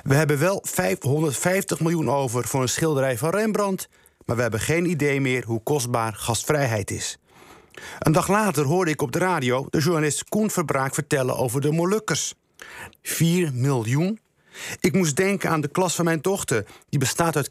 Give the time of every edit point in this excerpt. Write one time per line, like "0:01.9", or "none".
0:09.7
0:12.9